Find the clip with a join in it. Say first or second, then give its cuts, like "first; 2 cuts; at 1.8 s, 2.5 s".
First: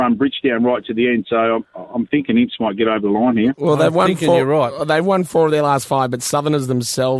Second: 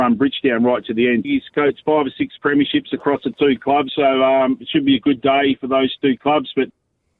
second; 2 cuts; at 1.2 s, 3.9 s